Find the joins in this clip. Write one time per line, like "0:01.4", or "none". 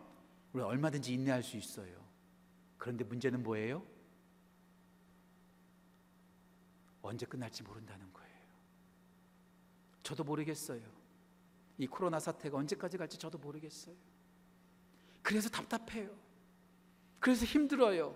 none